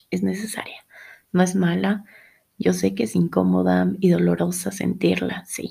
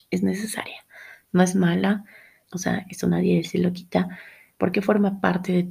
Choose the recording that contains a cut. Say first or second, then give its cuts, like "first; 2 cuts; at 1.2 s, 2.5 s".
second; 2 cuts; at 2.4 s, 4.5 s